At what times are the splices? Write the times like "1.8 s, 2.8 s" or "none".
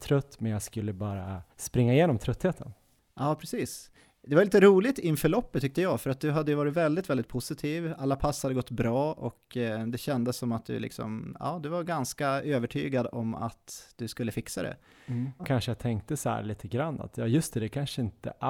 1.5 s, 15.4 s